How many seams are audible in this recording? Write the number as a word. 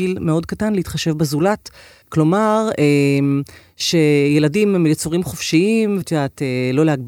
two